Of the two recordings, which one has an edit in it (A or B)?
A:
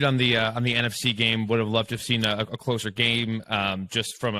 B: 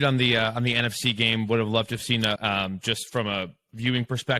B